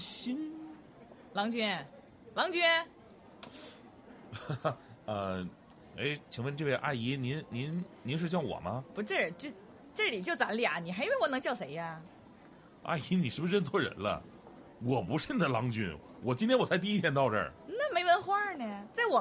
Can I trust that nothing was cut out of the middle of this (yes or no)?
yes